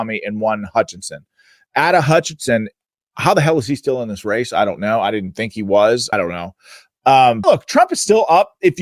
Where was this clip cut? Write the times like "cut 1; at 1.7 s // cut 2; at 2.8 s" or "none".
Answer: cut 1; at 6.1 s // cut 2; at 7.4 s